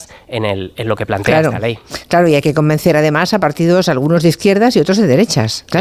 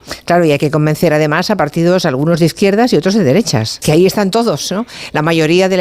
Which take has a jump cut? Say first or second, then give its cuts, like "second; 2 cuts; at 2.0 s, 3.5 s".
second; 1 cut; at 3.8 s